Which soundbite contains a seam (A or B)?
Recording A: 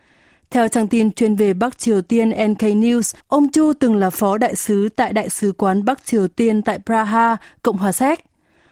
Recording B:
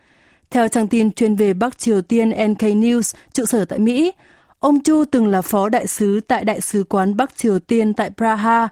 A